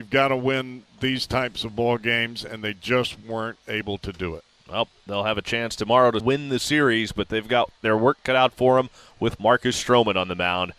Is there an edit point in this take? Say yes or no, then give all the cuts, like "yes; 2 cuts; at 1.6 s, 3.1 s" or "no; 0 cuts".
yes; 1 cut; at 6.2 s